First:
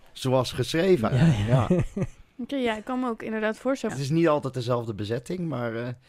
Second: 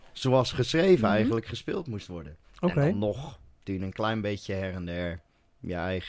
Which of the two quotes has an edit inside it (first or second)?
first